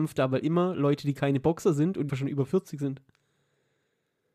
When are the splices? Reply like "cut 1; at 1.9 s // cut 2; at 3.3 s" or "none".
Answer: cut 1; at 2.1 s